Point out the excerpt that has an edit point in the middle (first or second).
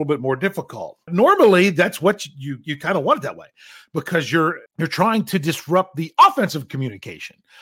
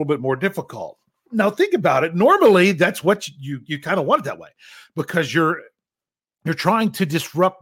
first